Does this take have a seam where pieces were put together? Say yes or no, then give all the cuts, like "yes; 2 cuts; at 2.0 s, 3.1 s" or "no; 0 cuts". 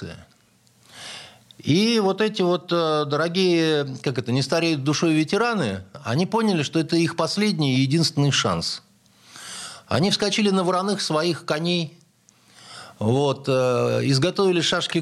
no; 0 cuts